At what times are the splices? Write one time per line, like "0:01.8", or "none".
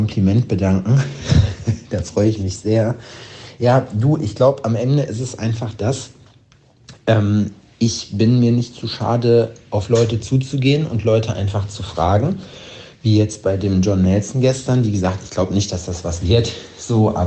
none